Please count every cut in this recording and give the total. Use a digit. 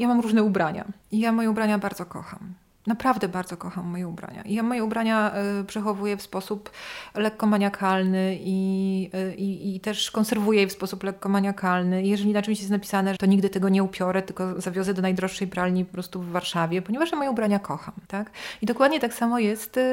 3